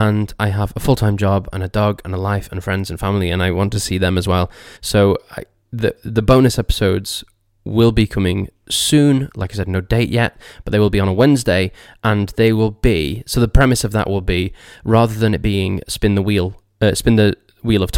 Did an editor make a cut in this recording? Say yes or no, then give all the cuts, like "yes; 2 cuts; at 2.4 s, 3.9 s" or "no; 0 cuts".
yes; 2 cuts; at 1.5 s, 4.8 s